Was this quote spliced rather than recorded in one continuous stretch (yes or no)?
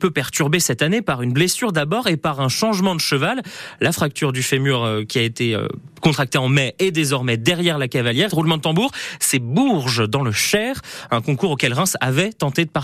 yes